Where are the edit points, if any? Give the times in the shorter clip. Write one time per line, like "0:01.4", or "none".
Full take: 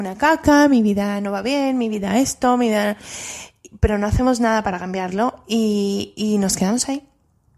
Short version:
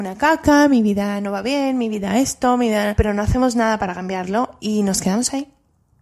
0:02.9
0:04.6